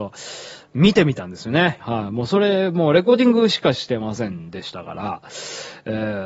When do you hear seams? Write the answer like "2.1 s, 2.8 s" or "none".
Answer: 1.8 s